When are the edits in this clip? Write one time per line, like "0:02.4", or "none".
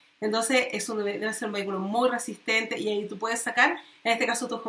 none